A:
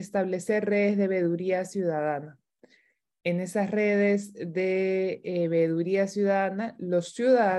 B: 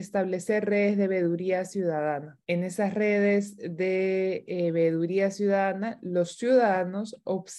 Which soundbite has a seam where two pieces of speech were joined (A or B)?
B